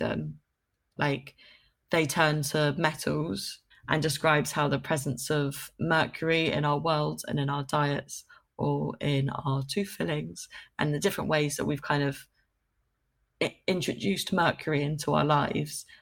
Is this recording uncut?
no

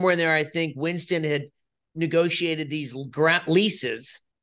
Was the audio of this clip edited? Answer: no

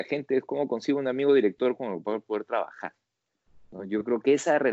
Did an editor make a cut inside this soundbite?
no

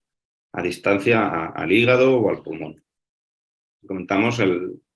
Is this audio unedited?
no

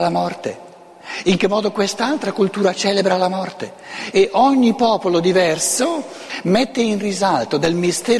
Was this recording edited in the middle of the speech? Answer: yes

